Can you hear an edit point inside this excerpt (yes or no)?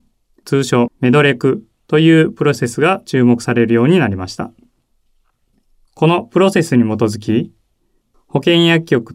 yes